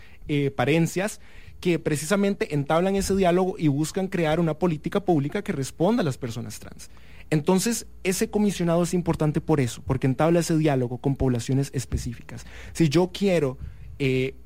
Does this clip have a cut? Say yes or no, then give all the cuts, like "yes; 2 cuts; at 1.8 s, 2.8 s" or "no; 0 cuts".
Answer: no; 0 cuts